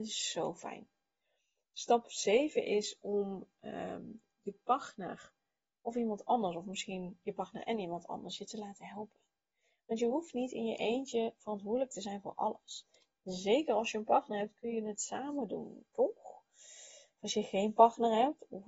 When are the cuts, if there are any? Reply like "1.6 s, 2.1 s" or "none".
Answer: none